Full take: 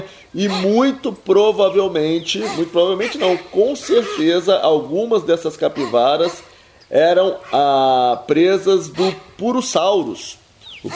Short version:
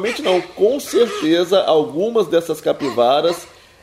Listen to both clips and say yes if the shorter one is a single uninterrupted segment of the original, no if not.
yes